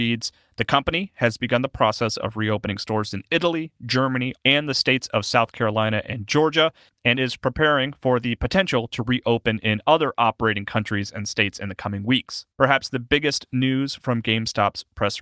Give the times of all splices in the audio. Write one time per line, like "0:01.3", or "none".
0:04.3
0:12.5